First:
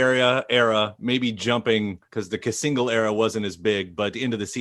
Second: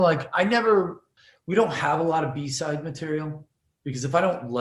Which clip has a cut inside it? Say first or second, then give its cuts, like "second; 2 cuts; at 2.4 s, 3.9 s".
first; 1 cut; at 2.0 s